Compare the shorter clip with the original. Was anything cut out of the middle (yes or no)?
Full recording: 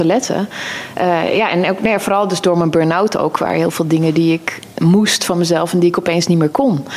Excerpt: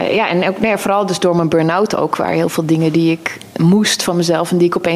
no